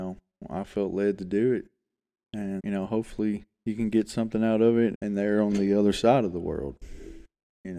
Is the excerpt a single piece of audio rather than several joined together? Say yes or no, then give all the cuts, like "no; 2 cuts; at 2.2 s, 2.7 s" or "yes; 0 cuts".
no; 2 cuts; at 2.6 s, 4.9 s